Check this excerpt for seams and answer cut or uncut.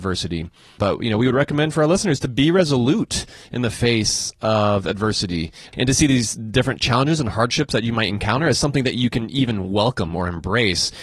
uncut